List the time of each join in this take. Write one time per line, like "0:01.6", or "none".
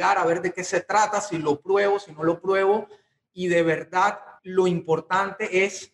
0:04.4